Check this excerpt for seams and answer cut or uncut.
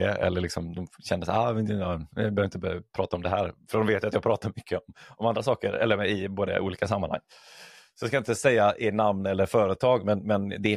uncut